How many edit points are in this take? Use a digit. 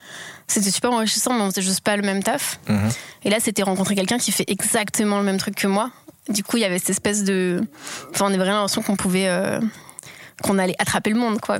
0